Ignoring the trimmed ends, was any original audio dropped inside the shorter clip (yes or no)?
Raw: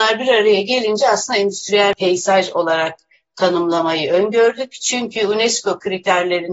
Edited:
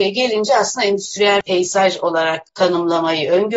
yes